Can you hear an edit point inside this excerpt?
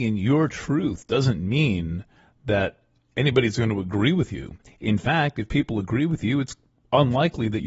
no; 0 cuts

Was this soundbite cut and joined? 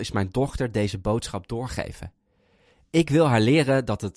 no; 0 cuts

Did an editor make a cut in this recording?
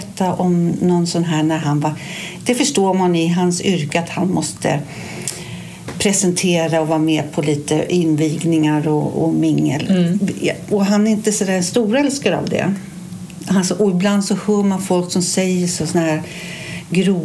no; 0 cuts

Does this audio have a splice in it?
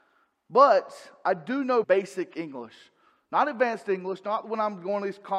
yes; 1 cut; at 1.8 s

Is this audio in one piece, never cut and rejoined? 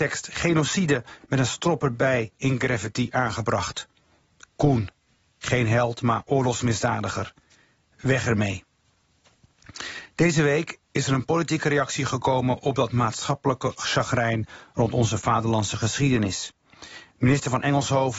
yes; 0 cuts

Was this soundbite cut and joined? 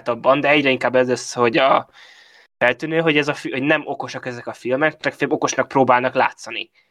no; 0 cuts

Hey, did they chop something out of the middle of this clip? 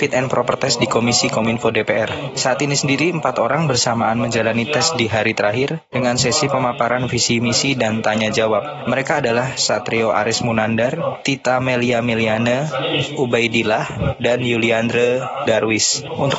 no; 0 cuts

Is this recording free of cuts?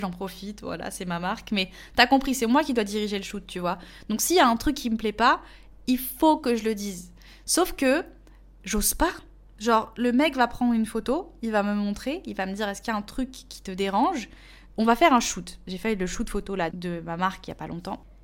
no; 2 cuts; at 14.7 s, 16.7 s

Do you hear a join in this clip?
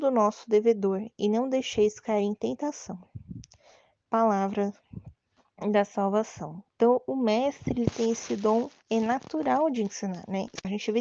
yes; 2 cuts; at 6.6 s, 8.8 s

